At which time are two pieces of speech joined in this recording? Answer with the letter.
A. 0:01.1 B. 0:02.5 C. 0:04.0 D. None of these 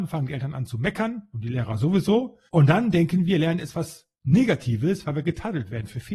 B